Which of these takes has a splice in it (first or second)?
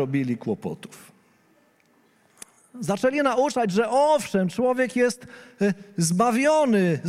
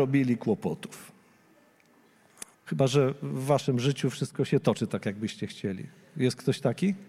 second